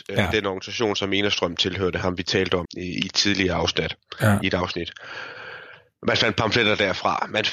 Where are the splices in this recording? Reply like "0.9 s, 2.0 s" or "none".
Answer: 2.7 s